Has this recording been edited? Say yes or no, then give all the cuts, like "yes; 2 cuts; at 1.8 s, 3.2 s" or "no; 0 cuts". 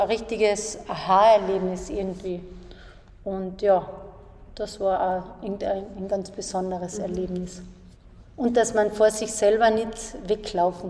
no; 0 cuts